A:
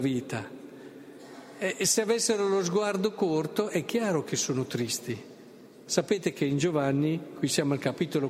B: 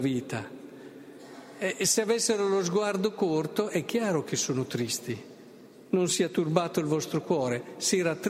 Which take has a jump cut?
A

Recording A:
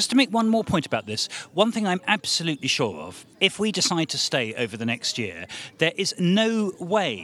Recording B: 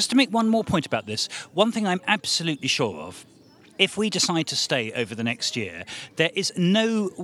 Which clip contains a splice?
A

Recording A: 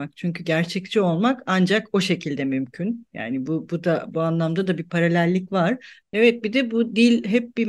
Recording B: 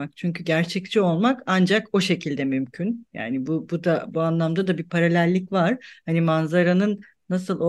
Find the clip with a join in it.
A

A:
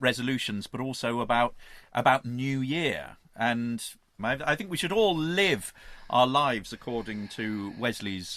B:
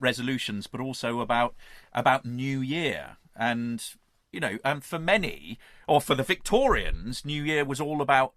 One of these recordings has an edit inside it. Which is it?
A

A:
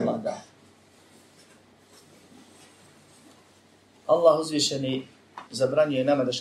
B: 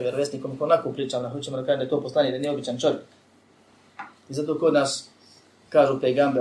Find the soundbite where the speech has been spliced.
A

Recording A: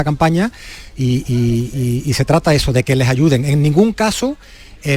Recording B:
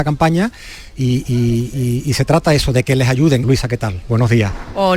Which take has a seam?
B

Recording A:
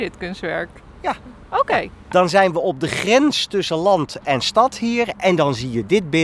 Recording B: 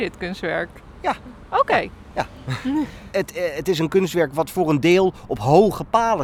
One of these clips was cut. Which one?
A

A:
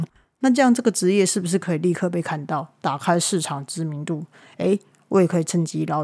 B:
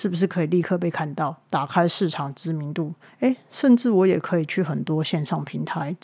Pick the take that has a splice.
B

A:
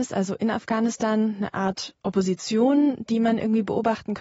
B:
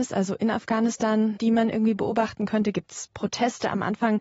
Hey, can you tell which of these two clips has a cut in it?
B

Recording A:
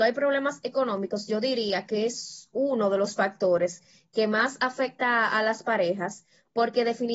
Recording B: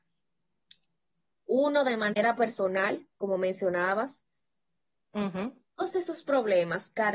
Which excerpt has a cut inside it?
B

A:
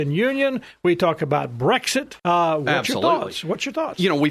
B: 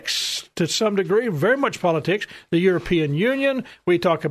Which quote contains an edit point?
A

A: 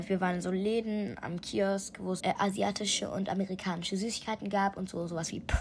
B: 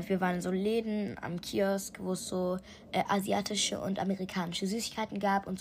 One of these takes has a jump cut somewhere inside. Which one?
A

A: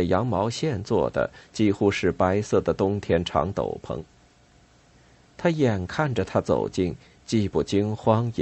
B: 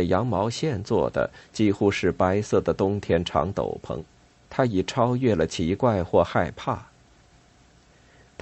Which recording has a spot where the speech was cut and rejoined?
B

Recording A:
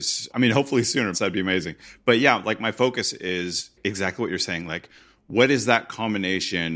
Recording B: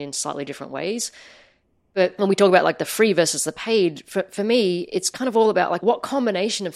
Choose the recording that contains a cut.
A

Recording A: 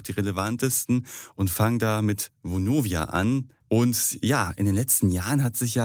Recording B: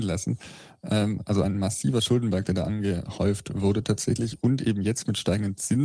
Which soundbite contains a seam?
A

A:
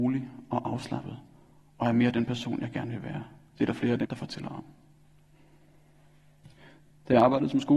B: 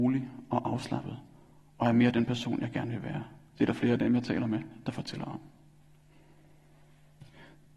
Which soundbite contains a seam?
A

